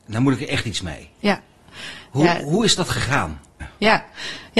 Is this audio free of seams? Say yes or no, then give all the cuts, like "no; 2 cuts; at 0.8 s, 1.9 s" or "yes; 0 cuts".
no; 1 cut; at 3.6 s